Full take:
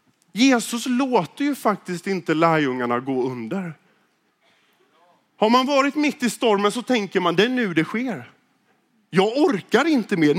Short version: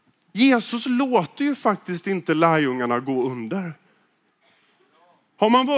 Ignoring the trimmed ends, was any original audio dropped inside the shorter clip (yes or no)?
no